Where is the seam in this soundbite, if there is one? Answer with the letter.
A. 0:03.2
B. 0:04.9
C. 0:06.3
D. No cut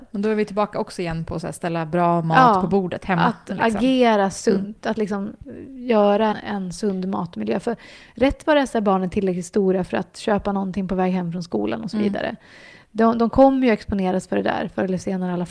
C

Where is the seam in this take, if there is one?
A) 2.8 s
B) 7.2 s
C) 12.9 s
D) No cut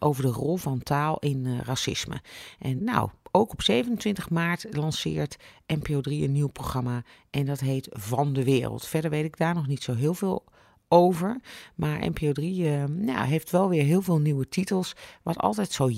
A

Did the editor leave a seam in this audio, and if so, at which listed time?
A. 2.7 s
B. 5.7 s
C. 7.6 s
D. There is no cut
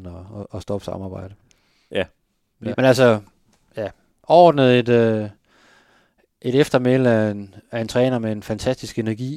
A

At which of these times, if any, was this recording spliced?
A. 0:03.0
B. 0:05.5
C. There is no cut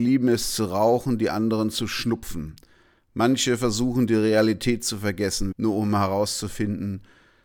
B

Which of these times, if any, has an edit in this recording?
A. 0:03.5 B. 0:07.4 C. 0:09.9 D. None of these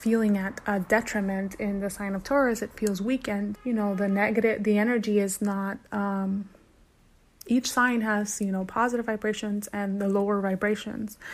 A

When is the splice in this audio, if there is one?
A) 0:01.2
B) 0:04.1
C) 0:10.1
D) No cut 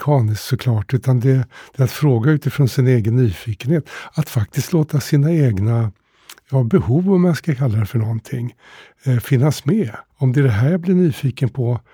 C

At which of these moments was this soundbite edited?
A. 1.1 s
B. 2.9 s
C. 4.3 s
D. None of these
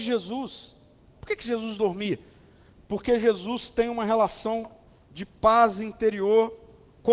A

